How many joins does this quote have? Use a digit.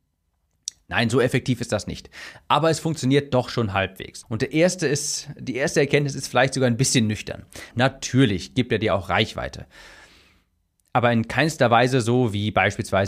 2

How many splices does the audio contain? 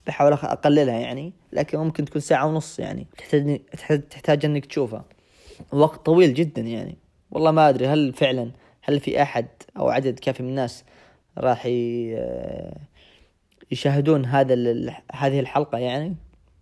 3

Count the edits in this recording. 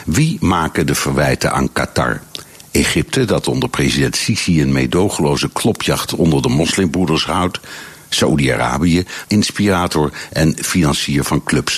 1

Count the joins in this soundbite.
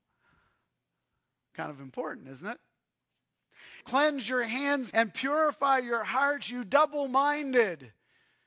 2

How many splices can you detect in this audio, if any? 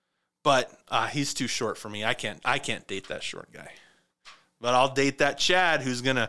0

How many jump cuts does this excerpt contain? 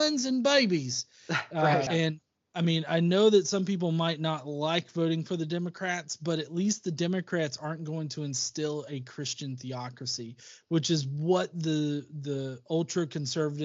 1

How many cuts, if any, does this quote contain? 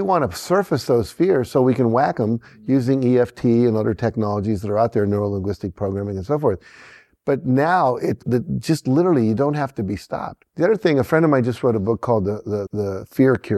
3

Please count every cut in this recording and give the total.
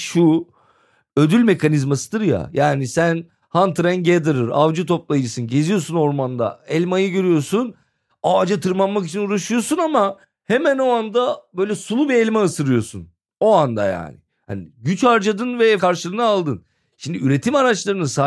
0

